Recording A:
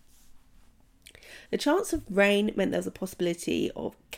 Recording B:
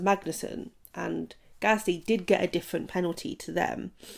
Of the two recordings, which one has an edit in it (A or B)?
A